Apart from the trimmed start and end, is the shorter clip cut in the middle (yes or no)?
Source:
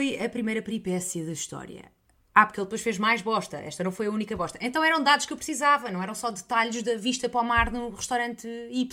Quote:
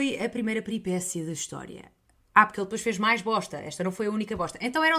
no